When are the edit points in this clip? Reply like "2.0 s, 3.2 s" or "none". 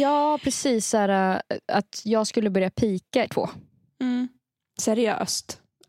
3.3 s